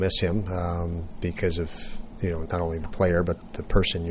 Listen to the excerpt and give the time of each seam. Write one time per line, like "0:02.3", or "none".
0:02.4